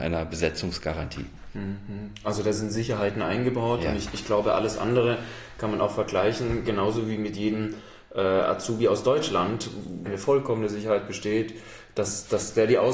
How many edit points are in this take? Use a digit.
1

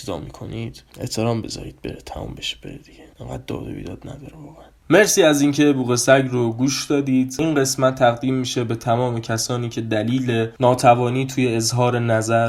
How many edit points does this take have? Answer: 1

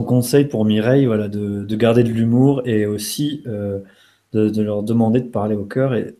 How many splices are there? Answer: 0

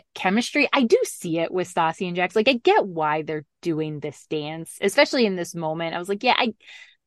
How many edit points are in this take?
0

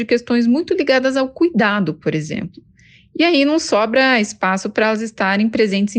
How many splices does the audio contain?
0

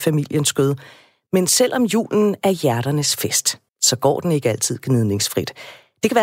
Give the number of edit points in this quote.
1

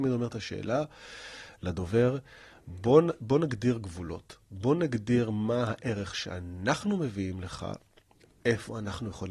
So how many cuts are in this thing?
0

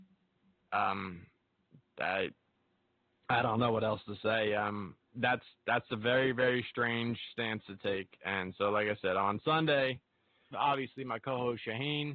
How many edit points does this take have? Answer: 1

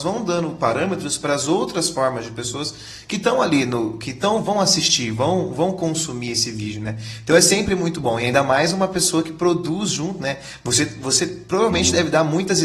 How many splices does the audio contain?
0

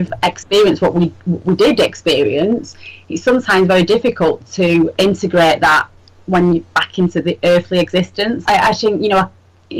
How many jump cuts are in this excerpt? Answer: 1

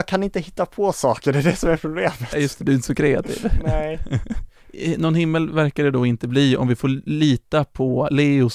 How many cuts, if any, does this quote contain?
0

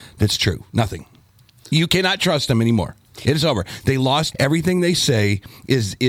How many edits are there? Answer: 1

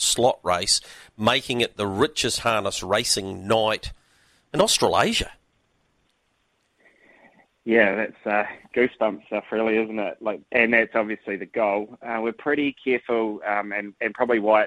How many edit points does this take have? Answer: 0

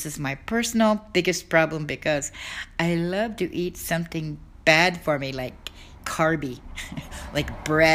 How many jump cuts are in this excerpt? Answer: 1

